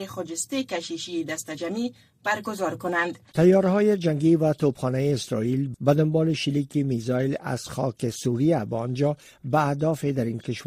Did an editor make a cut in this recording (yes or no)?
yes